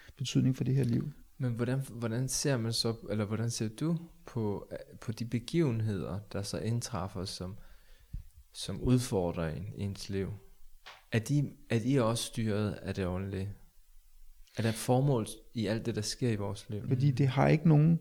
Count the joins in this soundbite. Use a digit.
1